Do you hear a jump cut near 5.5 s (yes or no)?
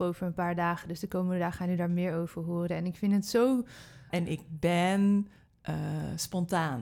no